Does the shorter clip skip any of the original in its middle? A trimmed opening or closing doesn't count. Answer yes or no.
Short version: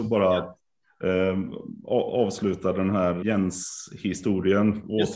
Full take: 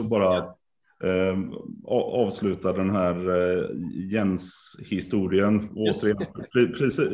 yes